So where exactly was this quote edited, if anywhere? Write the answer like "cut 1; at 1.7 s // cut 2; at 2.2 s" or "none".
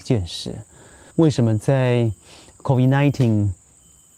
cut 1; at 1.1 s